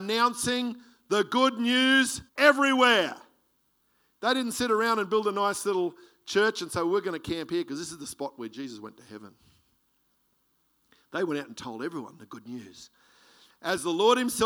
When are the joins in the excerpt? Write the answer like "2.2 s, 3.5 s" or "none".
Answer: 2.3 s